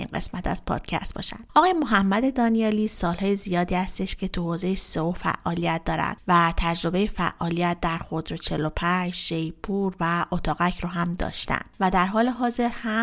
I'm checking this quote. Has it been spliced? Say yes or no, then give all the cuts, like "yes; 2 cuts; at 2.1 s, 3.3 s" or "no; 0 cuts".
no; 0 cuts